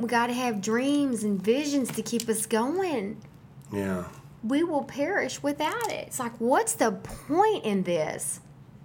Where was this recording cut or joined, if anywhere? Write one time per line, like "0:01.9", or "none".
none